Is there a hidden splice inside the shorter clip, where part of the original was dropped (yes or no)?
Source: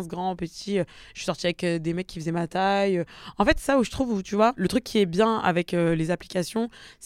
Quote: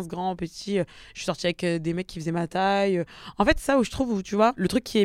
no